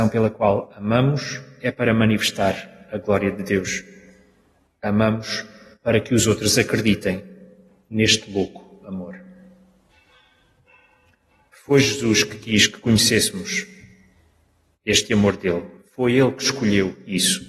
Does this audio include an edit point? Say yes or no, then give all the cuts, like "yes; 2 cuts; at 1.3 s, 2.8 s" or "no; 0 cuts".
no; 0 cuts